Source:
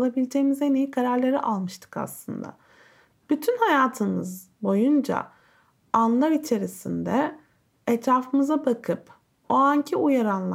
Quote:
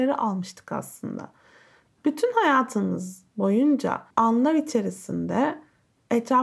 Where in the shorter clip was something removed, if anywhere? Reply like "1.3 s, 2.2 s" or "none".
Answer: 4.1 s